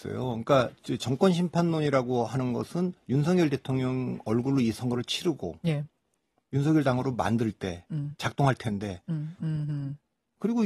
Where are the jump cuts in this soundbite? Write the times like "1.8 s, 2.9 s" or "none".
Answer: 9.4 s

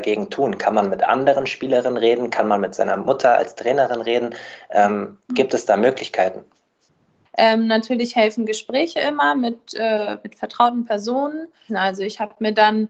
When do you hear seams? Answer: 7.2 s, 11.7 s

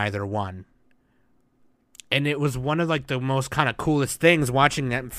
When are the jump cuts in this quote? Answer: none

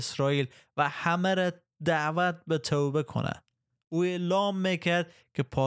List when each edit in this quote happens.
none

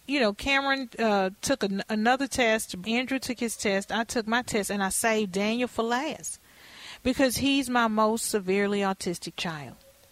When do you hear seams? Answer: 2.8 s

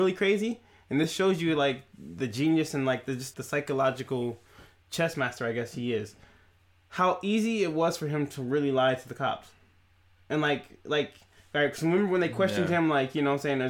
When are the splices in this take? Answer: 3.3 s

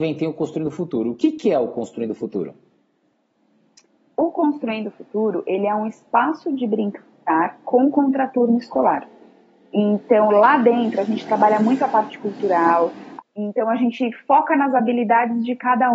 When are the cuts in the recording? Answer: 13.2 s

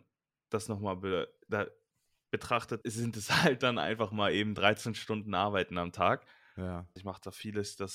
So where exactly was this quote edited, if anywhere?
2.8 s, 7.0 s

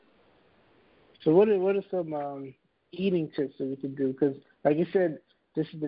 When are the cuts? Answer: none

